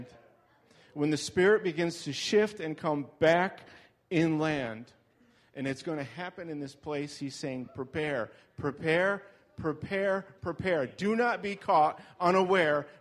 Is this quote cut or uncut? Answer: uncut